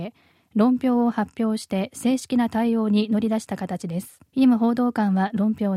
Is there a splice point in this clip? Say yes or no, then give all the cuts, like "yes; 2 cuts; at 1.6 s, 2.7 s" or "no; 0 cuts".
yes; 1 cut; at 4.3 s